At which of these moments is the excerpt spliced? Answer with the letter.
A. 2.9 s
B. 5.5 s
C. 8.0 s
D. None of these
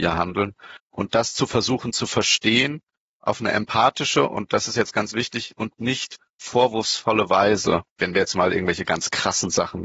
C